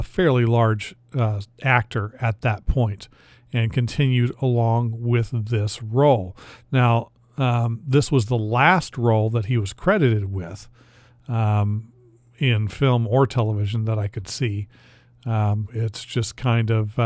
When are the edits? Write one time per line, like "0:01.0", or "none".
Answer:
0:15.7